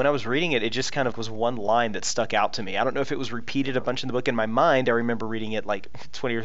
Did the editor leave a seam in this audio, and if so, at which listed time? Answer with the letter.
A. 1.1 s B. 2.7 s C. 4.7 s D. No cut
A